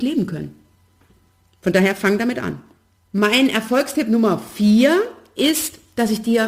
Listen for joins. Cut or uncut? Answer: uncut